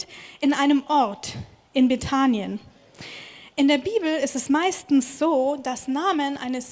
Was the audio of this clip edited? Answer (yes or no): no